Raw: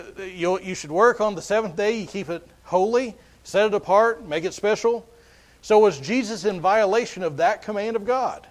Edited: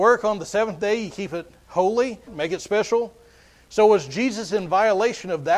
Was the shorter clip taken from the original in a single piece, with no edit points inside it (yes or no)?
no